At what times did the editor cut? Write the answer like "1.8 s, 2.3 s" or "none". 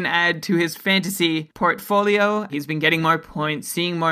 2.5 s